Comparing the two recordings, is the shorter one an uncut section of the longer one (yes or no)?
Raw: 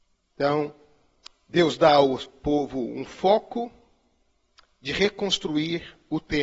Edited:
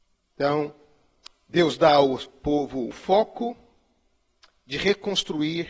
no